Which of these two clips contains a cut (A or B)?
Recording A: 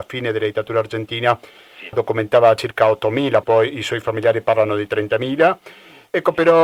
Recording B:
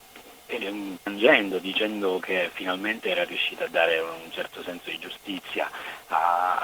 A